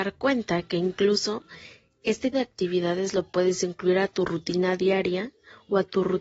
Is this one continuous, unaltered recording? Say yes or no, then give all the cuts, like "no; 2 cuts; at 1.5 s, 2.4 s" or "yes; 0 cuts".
no; 1 cut; at 2.3 s